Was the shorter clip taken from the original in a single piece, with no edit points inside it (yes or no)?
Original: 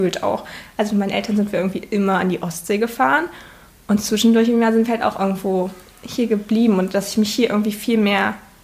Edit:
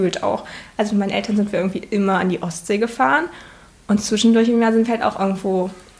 yes